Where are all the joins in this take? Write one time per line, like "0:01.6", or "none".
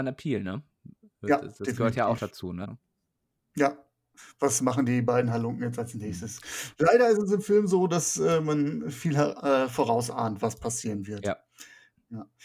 0:02.6